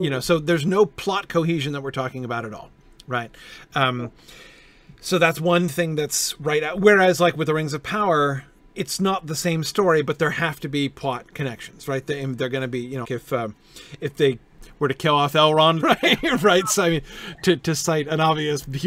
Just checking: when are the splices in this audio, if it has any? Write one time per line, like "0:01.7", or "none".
0:13.0
0:15.8

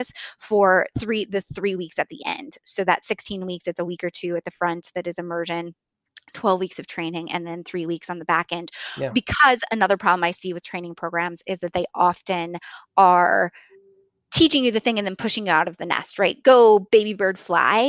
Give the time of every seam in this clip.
none

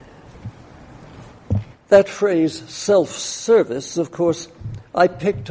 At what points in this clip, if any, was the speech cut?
none

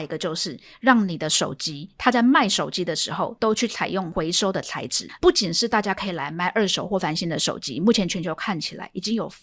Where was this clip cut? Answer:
0:03.4
0:05.2

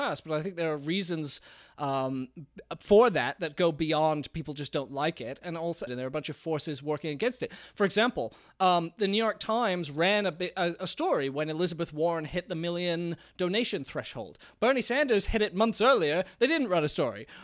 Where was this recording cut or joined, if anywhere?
0:05.9

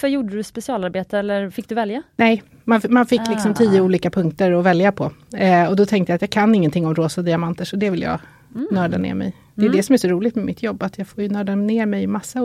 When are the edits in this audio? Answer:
none

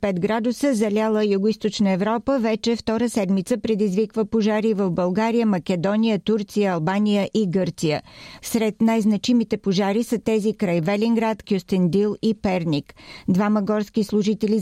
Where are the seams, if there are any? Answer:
0:08.4
0:11.4

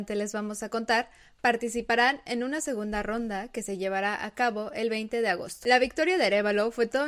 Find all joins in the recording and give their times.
none

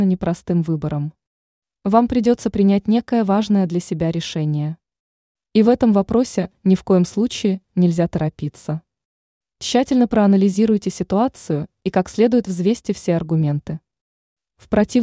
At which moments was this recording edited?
none

